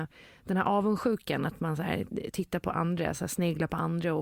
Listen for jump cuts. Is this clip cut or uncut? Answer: uncut